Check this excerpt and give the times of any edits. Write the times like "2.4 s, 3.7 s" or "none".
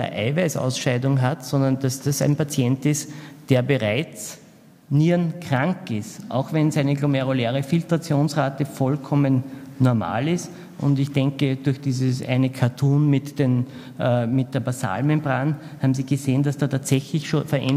none